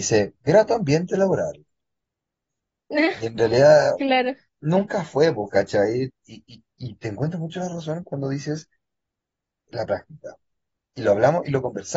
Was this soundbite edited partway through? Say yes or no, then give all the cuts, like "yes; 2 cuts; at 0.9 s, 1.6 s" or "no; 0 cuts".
yes; 2 cuts; at 6.1 s, 9.7 s